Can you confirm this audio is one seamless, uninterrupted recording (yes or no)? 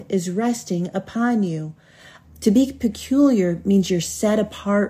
no